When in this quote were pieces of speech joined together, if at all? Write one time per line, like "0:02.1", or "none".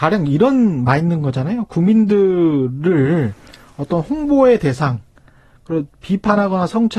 none